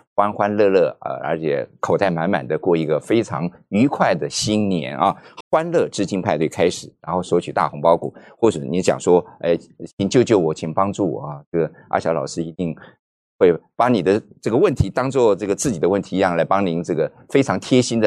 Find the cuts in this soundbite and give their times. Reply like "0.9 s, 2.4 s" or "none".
5.4 s